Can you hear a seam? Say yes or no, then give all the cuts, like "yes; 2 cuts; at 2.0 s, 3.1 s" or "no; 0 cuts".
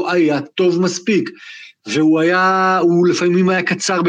no; 0 cuts